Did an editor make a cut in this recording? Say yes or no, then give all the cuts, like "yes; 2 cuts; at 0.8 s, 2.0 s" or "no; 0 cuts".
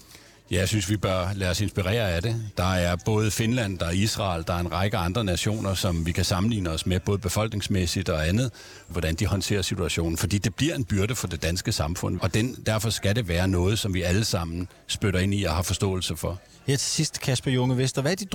yes; 2 cuts; at 8.9 s, 12.2 s